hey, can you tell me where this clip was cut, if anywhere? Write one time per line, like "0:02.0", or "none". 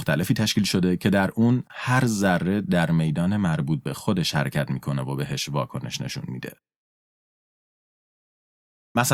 none